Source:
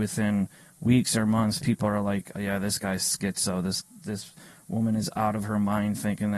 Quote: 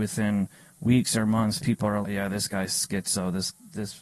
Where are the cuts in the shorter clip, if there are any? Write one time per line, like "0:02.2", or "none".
0:02.0